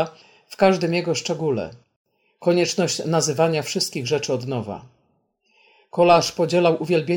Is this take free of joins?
yes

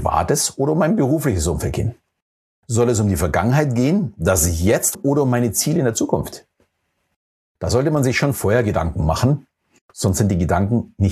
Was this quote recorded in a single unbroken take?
no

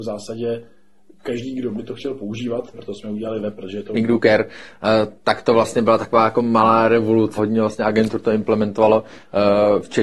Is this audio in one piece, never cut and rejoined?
no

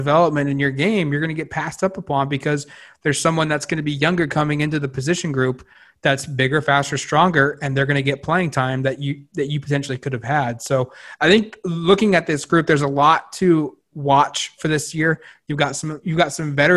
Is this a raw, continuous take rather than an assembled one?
yes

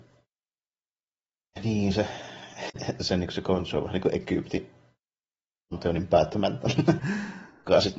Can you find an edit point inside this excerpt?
yes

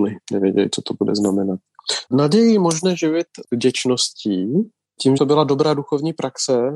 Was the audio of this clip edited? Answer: yes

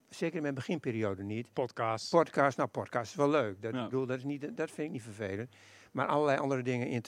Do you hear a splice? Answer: no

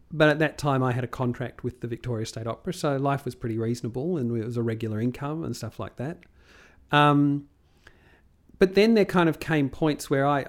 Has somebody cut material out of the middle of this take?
no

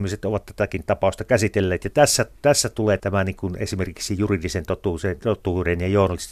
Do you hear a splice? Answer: yes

